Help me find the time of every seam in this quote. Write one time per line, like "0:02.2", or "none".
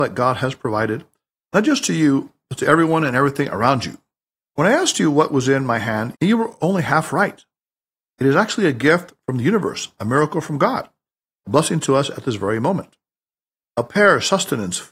0:06.1